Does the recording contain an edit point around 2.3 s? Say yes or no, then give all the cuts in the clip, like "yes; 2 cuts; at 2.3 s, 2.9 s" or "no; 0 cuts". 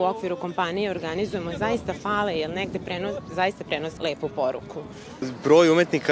no; 1 cut; at 4.0 s